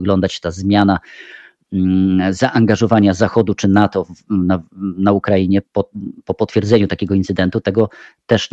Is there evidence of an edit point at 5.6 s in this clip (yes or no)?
yes